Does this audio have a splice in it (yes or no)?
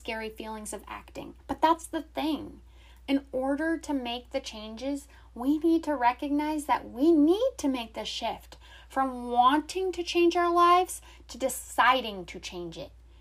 yes